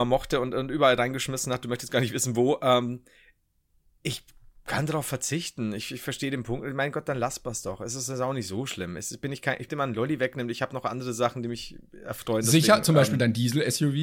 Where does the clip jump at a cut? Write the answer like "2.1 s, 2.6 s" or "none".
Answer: 9.7 s